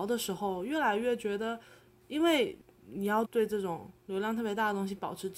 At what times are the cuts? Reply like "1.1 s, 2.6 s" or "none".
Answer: 3.3 s